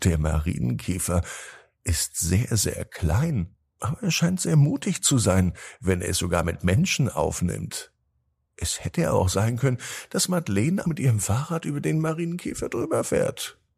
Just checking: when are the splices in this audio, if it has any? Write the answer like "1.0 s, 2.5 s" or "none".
10.8 s